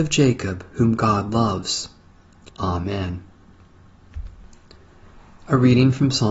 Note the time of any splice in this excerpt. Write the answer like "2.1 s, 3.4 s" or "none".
2.5 s